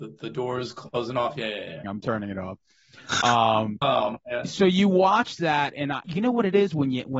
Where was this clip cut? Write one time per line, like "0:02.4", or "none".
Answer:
0:01.8
0:03.8
0:06.0